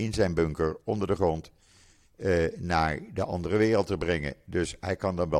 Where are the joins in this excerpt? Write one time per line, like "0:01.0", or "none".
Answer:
none